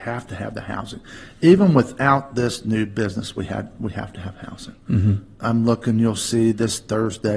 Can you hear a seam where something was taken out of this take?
yes; 1 cut; at 5.4 s

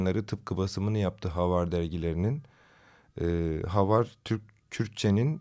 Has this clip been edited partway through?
no; 0 cuts

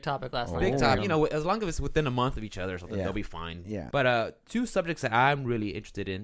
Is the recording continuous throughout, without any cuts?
no; 2 cuts; at 1.0 s, 3.9 s

